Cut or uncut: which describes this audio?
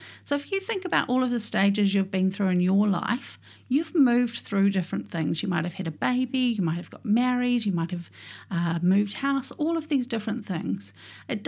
uncut